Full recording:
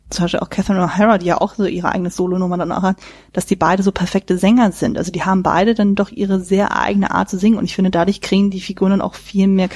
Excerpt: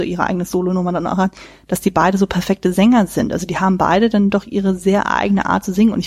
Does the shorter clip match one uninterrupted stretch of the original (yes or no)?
yes